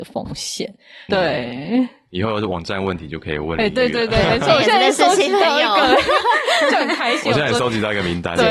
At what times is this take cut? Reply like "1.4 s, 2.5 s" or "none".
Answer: 1.1 s